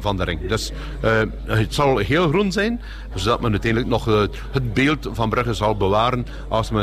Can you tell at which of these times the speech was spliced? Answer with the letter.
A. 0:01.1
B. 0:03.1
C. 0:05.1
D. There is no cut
B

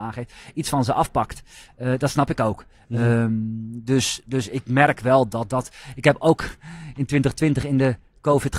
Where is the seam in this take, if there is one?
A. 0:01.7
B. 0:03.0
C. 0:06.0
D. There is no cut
D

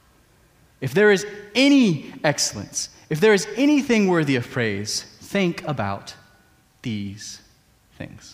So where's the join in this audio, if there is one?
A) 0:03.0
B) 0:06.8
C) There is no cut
C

